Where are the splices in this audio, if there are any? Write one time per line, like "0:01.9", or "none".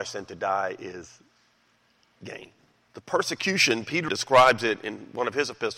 0:02.8
0:04.1

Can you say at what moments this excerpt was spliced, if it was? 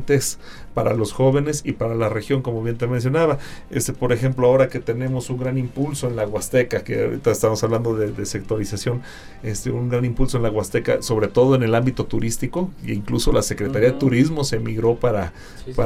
none

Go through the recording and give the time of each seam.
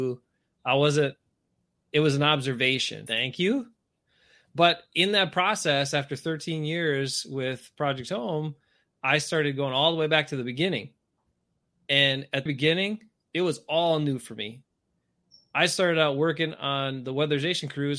0:03.1
0:12.5

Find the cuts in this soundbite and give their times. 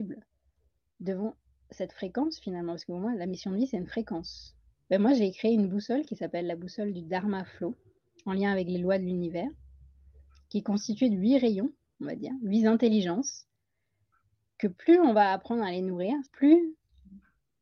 0:04.7
0:12.0
0:16.3

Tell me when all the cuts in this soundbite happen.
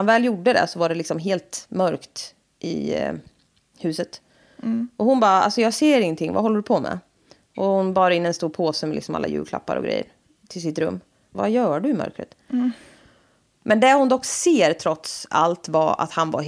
0:11.3

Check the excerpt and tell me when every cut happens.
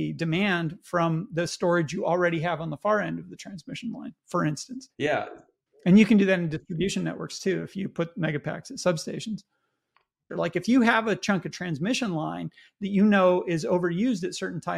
0:10.3

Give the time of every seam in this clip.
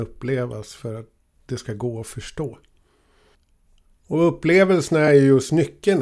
none

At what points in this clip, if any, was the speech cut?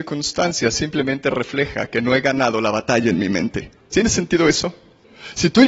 0:03.9

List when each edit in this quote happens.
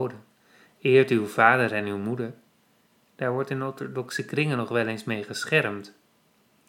none

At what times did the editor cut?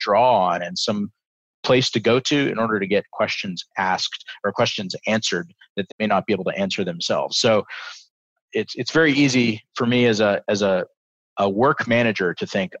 0:05.9

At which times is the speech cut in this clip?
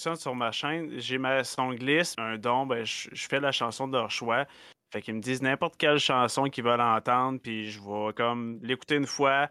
0:02.1

